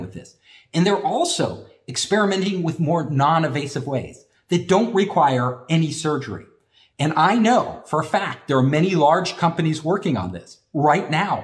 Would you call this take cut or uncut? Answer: cut